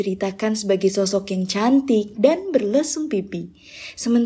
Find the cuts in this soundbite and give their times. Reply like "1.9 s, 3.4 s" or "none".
2.1 s